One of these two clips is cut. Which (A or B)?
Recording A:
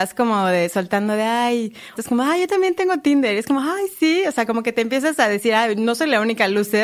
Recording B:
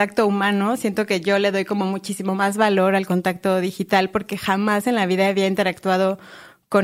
A